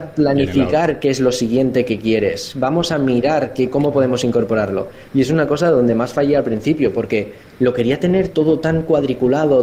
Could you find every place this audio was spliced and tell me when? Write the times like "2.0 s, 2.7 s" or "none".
none